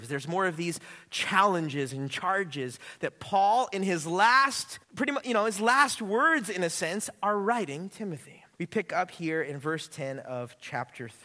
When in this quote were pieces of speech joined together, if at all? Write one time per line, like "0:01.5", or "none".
0:04.8
0:08.5